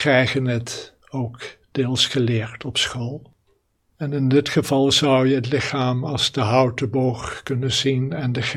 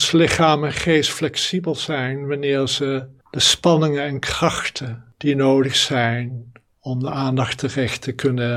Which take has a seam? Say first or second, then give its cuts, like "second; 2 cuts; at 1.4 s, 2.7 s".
first; 1 cut; at 3.9 s